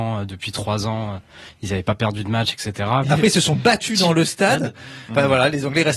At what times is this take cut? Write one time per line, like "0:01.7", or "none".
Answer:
0:03.0